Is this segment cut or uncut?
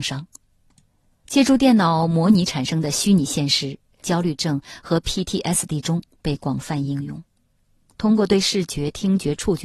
cut